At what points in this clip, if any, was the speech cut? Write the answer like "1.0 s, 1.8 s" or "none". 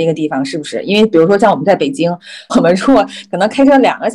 2.5 s